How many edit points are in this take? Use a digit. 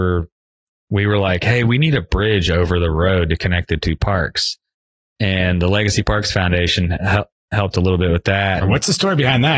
1